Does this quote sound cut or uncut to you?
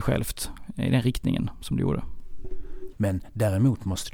cut